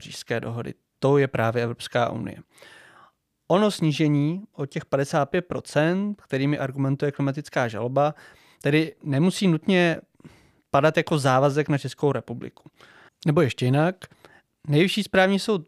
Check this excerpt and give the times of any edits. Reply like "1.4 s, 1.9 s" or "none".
13.1 s